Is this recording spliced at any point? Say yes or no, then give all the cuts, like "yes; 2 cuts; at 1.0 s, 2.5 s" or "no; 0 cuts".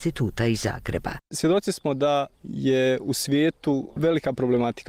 no; 0 cuts